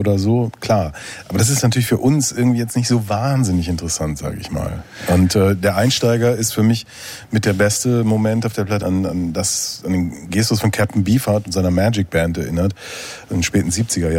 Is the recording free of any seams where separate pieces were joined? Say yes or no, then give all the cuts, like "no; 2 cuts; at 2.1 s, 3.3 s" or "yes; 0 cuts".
no; 1 cut; at 8.8 s